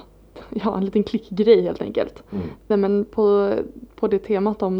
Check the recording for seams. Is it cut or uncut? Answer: cut